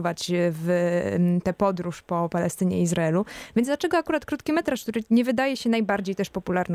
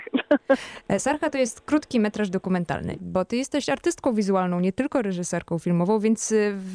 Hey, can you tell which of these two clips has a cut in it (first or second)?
second